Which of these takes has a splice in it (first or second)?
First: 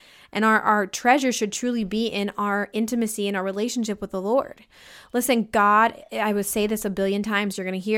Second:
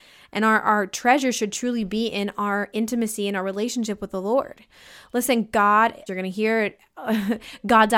second